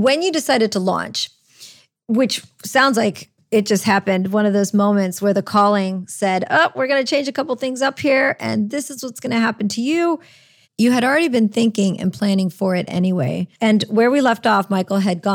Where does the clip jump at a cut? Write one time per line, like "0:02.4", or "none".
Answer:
0:13.5